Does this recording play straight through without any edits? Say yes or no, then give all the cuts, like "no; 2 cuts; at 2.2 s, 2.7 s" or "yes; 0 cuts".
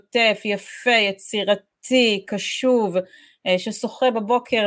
yes; 0 cuts